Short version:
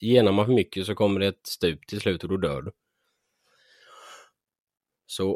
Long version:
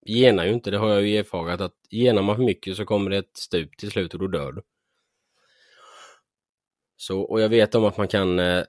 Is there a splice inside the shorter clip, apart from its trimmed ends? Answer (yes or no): no